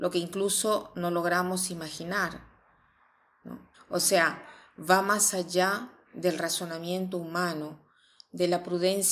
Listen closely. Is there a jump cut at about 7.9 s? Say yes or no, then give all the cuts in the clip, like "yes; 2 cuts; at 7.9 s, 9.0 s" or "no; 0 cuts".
no; 1 cut; at 3.7 s